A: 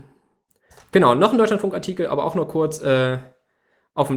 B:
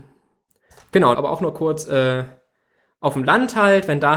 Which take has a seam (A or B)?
B